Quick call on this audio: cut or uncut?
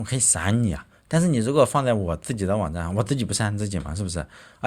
uncut